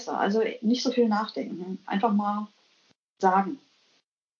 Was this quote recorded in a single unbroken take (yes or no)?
yes